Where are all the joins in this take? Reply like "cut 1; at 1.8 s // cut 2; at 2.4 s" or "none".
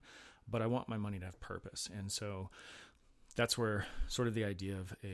none